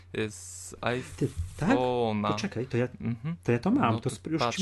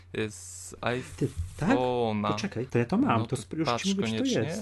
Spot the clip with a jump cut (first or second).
second